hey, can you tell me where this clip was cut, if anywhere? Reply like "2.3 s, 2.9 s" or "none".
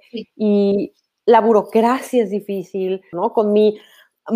3.1 s